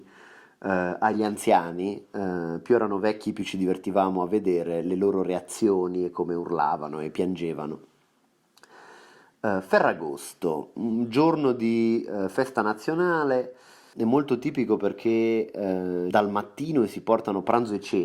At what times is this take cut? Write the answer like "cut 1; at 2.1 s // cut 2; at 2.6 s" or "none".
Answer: cut 1; at 13.9 s // cut 2; at 16.1 s